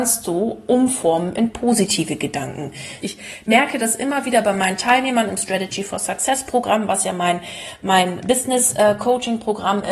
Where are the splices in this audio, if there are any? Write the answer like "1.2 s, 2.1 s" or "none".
3.0 s, 8.2 s